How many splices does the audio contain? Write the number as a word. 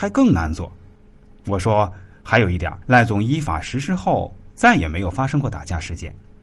one